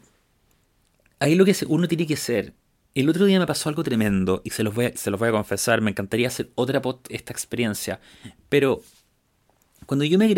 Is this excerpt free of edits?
no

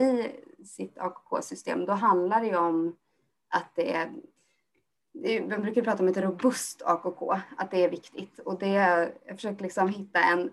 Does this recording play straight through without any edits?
yes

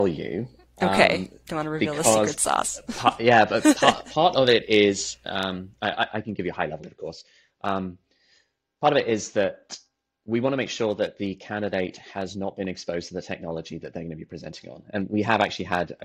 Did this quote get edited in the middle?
no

